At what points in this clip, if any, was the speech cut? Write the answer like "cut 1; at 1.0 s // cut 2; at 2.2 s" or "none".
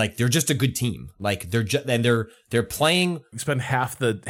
cut 1; at 3.3 s